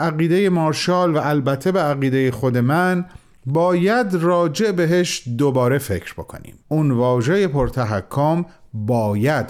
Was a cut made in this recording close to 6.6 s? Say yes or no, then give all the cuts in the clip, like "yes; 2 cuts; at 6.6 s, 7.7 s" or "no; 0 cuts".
yes; 1 cut; at 6.6 s